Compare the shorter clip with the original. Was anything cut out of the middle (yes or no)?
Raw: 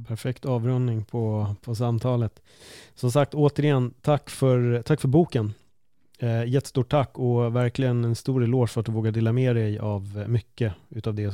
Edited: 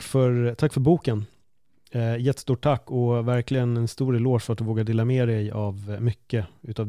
no